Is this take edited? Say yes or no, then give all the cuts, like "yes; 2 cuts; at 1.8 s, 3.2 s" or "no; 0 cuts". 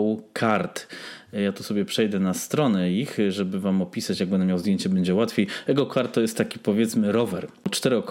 no; 0 cuts